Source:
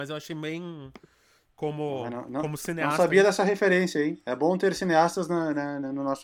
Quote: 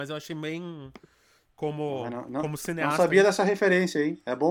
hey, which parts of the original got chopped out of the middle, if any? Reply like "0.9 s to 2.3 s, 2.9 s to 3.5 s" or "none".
none